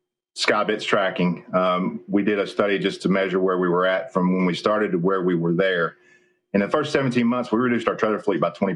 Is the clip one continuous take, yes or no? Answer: yes